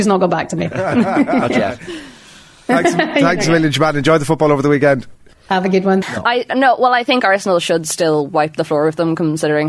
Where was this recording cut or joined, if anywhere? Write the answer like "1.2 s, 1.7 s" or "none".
6.0 s